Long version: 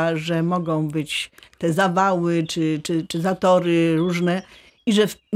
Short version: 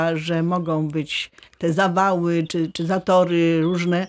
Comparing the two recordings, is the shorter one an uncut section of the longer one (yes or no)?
no